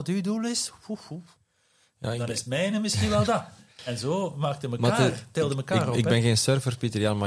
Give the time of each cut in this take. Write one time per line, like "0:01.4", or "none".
none

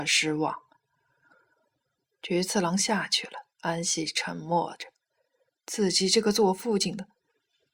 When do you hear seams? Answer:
0:02.0
0:03.5
0:05.5

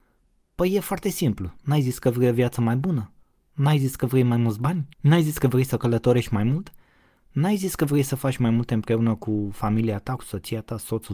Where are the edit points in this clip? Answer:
0:04.9
0:10.2

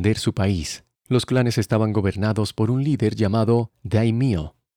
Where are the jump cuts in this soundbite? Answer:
0:00.9

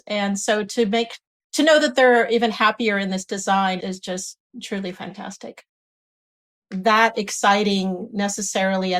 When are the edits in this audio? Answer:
0:03.8
0:06.6

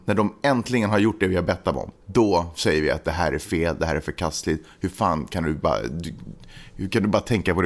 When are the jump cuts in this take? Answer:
0:01.9

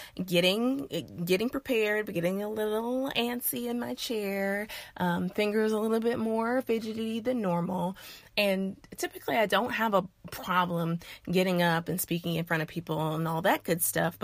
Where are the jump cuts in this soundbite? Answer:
none

